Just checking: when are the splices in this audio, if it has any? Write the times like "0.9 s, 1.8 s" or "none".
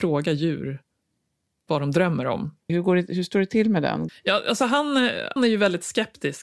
2.7 s, 4.1 s, 5.4 s